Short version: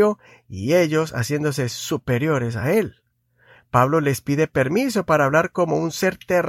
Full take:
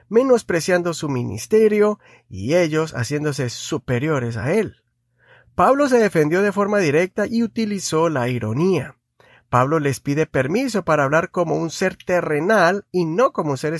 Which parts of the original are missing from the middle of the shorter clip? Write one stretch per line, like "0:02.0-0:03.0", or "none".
0:05.4-0:09.3